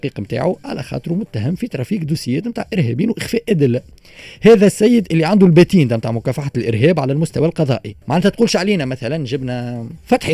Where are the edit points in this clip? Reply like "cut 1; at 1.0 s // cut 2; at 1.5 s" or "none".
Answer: cut 1; at 8.0 s